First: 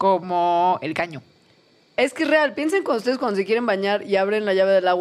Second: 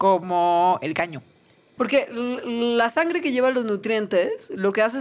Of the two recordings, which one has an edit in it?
second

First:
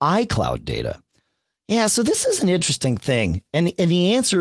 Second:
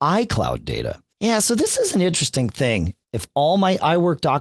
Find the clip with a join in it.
second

